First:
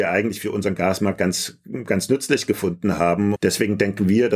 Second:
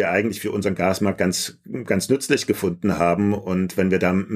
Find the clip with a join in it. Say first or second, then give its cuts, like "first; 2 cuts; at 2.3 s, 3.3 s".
first; 1 cut; at 3.4 s